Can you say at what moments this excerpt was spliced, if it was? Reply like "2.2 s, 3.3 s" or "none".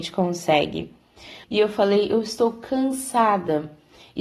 1.4 s